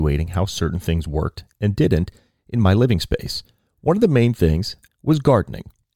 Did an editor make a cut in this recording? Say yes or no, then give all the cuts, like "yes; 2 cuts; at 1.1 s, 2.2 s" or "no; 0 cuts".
yes; 1 cut; at 4.9 s